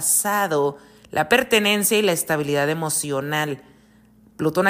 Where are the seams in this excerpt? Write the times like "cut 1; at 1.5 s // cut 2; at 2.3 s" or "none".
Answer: none